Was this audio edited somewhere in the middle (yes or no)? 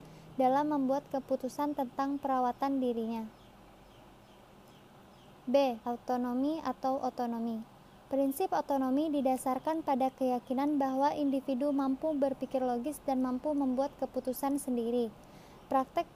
yes